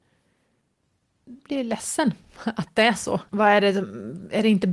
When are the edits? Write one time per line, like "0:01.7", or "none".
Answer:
0:01.4
0:03.3